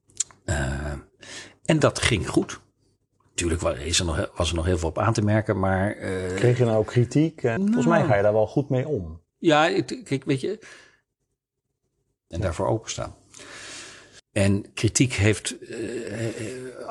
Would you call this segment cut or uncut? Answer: cut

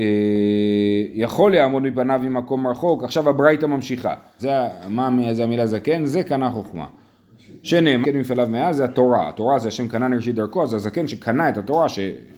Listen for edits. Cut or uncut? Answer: cut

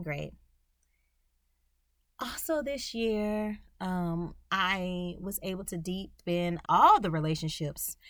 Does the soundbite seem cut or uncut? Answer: cut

